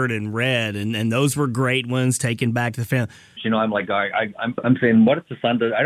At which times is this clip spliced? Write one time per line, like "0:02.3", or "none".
0:03.4
0:04.6